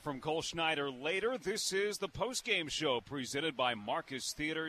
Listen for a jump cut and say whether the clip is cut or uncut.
uncut